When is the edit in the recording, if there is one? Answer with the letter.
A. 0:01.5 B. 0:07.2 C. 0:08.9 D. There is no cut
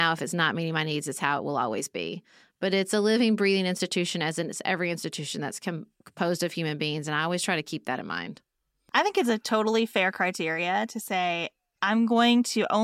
D